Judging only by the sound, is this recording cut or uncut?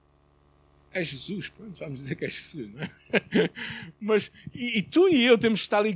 uncut